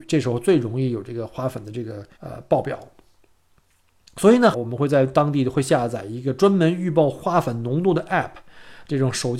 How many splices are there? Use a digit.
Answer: 2